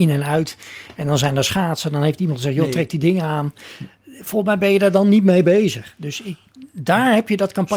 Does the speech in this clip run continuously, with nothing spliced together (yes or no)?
yes